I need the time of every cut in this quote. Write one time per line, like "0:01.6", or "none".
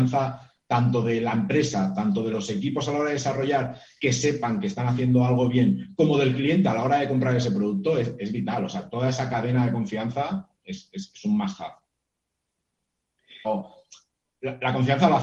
0:13.4